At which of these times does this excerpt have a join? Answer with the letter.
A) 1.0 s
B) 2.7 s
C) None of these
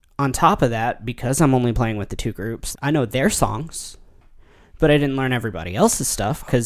B